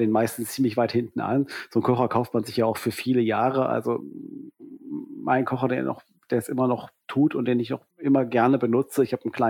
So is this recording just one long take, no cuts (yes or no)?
no